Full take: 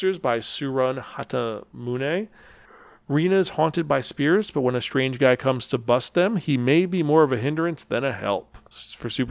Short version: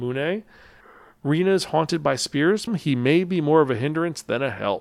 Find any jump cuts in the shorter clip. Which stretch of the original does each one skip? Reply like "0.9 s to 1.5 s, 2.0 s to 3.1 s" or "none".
4.5 s to 6.3 s